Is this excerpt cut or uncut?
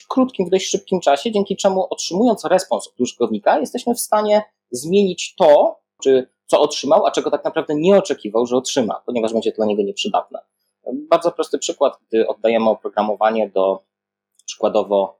cut